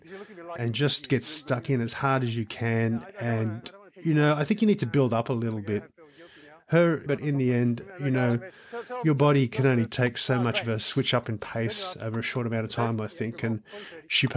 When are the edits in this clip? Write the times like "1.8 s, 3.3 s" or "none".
7.1 s